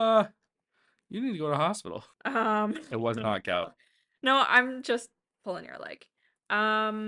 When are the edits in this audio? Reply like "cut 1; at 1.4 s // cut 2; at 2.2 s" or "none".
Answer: cut 1; at 2.1 s

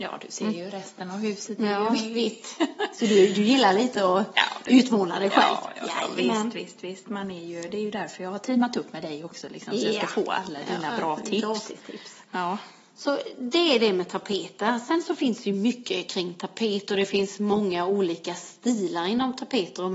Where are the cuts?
none

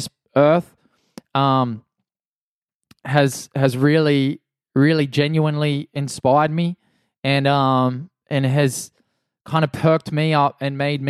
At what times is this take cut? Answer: none

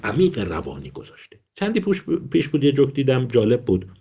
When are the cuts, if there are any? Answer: cut 1; at 1.5 s

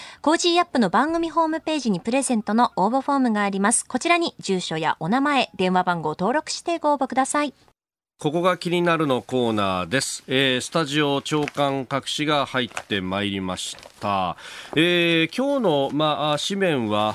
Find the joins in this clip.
none

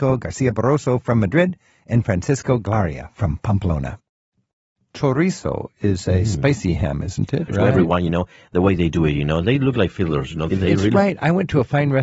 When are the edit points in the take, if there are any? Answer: cut 1; at 7.5 s // cut 2; at 10.5 s

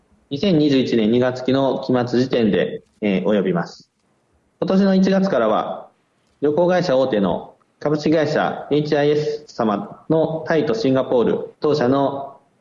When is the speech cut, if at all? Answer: cut 1; at 3.0 s // cut 2; at 11.6 s

